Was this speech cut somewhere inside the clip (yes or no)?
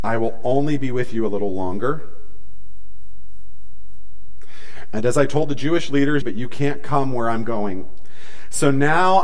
yes